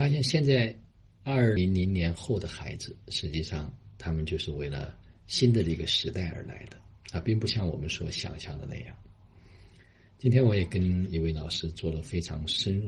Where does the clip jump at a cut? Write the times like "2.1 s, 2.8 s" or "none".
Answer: 1.6 s